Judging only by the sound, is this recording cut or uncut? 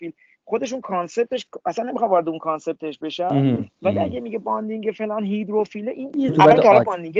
cut